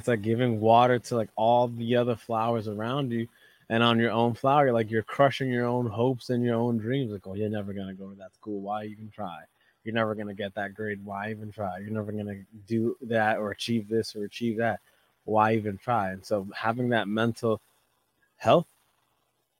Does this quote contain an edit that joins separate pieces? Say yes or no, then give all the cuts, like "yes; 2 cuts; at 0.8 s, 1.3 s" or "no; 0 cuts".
no; 0 cuts